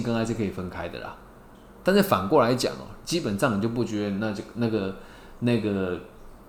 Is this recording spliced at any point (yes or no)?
yes